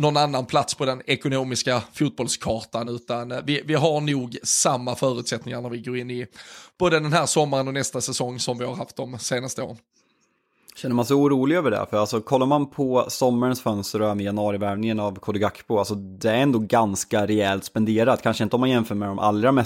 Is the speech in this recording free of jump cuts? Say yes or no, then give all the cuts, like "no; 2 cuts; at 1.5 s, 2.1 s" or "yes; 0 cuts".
yes; 0 cuts